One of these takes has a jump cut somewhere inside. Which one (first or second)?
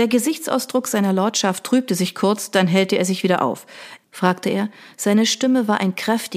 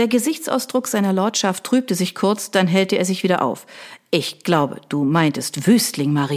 first